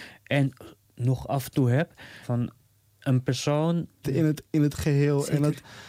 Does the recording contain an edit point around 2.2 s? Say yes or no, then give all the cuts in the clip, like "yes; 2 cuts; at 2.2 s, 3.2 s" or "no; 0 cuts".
yes; 2 cuts; at 2.2 s, 4.0 s